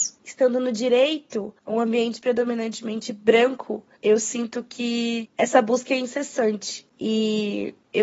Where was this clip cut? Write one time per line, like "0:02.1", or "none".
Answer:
0:04.0